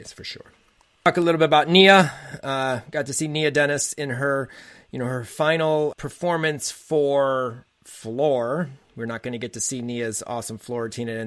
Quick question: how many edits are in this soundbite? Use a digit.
1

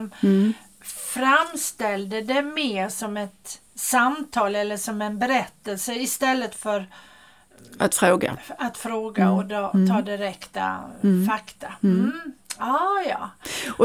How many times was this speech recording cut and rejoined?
0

